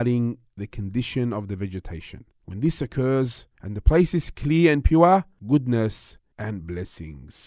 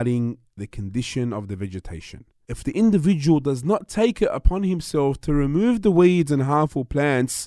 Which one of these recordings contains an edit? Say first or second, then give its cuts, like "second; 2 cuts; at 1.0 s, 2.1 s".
first; 2 cuts; at 2.4 s, 5.4 s